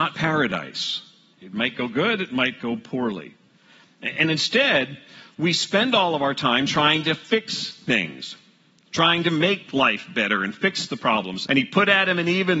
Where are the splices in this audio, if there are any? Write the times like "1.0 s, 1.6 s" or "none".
1.3 s, 11.4 s